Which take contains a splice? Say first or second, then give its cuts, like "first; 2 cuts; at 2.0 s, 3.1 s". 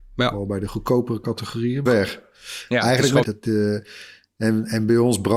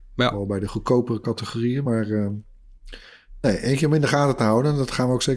first; 2 cuts; at 1.9 s, 3.2 s